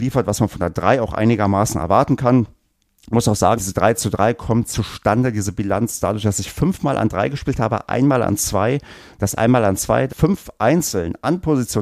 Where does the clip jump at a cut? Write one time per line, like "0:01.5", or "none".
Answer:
0:03.5
0:10.1

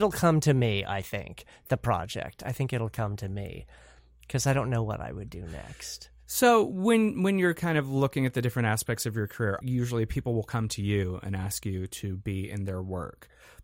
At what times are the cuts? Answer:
0:09.6

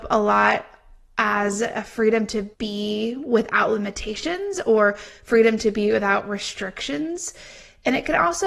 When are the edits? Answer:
0:02.5

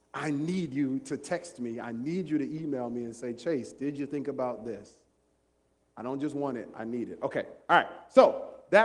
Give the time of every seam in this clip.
none

